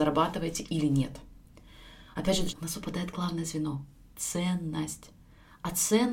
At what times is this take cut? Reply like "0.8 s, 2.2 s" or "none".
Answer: 2.5 s